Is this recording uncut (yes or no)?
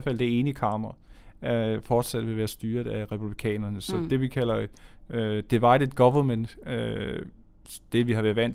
yes